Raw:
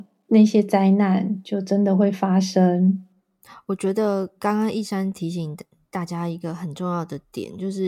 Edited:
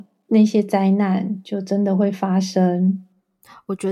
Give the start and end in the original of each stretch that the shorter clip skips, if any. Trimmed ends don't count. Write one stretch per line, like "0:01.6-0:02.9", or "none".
none